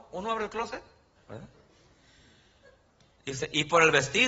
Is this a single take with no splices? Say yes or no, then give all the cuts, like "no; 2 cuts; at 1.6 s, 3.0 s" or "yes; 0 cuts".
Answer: no; 1 cut; at 1.2 s